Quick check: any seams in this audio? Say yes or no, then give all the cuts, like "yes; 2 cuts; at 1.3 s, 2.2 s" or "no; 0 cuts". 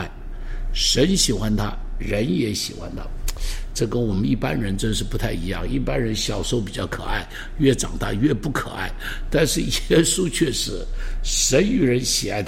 no; 0 cuts